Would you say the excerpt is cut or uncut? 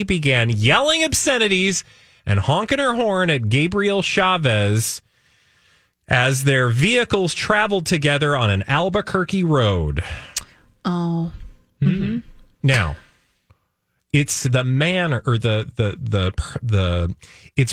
uncut